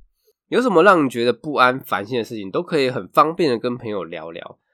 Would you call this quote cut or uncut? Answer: uncut